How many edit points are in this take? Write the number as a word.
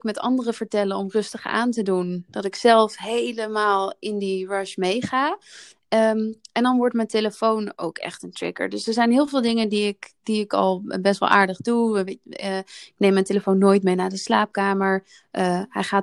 zero